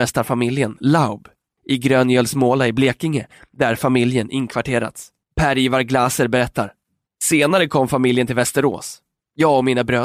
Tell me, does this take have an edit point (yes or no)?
yes